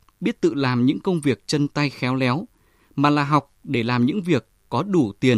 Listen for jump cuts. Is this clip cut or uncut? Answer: uncut